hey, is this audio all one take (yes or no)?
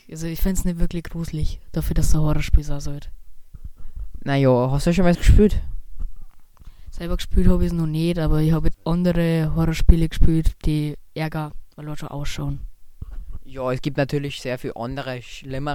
no